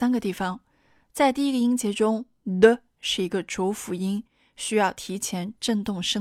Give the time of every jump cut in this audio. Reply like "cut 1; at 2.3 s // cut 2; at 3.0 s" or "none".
none